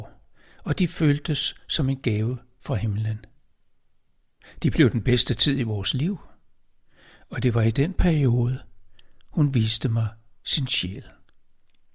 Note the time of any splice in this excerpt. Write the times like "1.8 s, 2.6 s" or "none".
none